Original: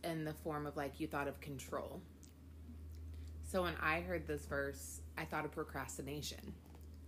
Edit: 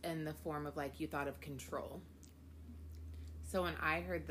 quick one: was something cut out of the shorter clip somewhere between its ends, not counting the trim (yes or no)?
no